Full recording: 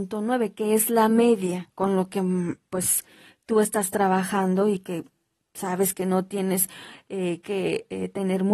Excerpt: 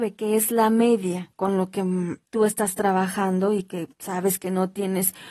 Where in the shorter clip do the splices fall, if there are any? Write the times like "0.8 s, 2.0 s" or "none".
2.2 s, 3.9 s